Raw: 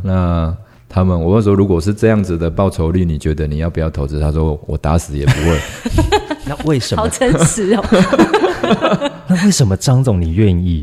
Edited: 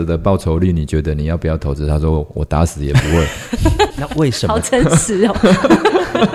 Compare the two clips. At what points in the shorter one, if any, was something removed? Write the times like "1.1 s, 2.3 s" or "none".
3.9 s